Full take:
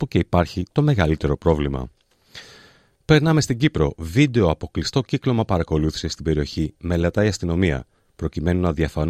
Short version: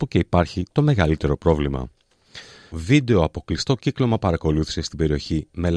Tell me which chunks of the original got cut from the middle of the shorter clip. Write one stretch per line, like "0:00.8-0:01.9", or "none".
0:02.7-0:04.0